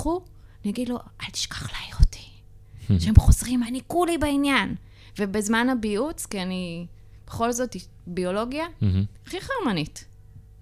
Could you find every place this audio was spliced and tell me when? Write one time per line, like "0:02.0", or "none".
0:03.7